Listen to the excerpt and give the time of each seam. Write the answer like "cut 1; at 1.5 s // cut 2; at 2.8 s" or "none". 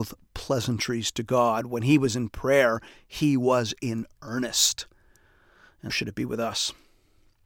cut 1; at 5.9 s